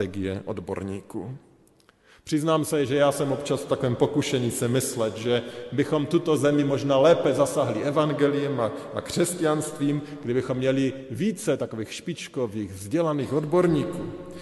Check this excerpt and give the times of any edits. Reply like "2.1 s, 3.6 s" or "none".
none

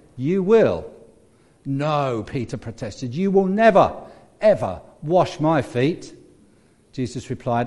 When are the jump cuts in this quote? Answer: none

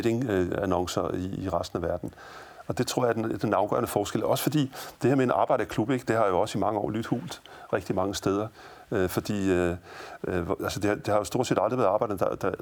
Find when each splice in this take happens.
none

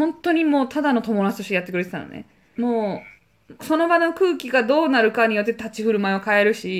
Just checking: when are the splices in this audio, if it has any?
2.6 s, 3.6 s

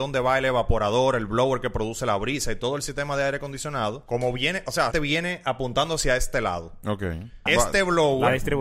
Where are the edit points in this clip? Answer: 4.9 s, 7.5 s

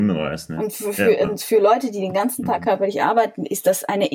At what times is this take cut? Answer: none

